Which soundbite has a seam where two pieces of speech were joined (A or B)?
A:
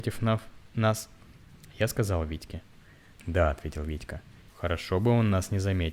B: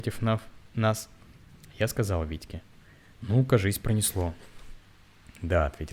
A